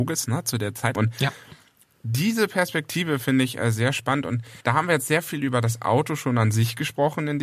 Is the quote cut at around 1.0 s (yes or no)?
yes